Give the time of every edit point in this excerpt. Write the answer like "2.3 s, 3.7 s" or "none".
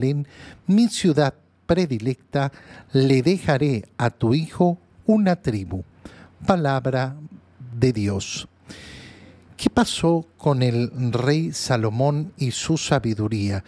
none

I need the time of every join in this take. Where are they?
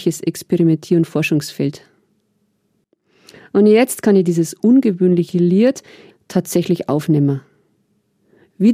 6.1 s

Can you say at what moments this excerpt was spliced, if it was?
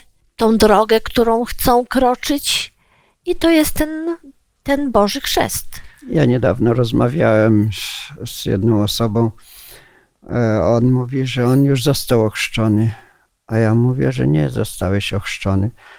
none

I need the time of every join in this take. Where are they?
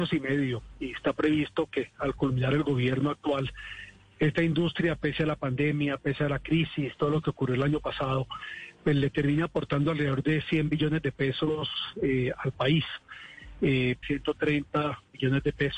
14.0 s

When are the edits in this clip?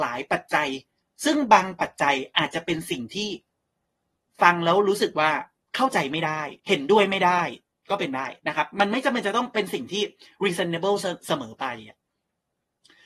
6.6 s, 8.4 s

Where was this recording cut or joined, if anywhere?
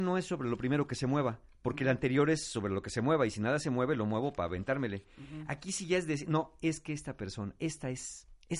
none

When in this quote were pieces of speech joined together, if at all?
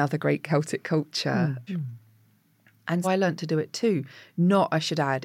1.7 s, 3.0 s

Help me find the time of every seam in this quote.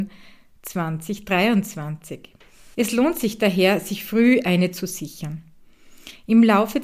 2.7 s

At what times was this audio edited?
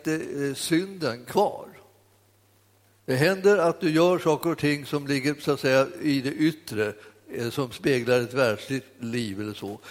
2.9 s

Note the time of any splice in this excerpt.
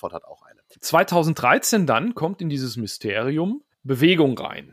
3.7 s

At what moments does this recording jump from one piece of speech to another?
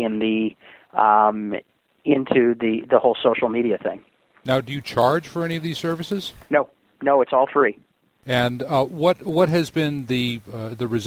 none

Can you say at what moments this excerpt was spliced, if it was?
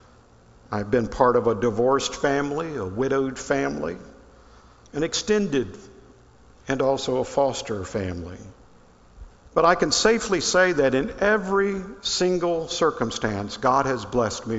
9.5 s

